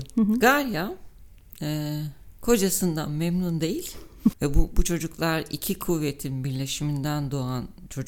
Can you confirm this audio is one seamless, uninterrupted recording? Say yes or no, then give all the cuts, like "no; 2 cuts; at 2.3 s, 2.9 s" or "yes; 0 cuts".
no; 1 cut; at 4.3 s